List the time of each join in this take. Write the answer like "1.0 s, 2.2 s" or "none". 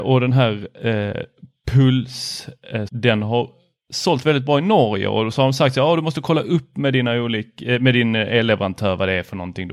2.9 s